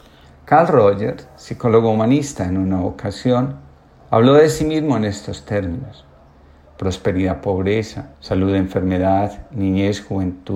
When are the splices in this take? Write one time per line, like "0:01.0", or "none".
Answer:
0:06.7
0:08.1